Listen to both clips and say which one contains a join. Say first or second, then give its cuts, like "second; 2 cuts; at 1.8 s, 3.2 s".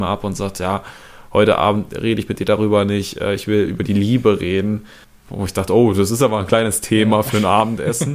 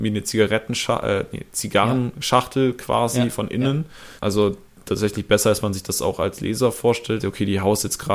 second; 2 cuts; at 4.2 s, 7.2 s